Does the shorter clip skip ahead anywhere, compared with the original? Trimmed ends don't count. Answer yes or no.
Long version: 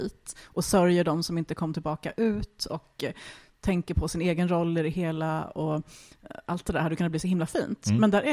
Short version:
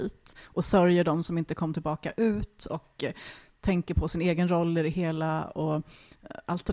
no